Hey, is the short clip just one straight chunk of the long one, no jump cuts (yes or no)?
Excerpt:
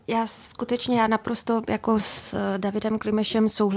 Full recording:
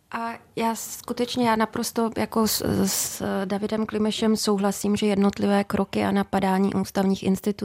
no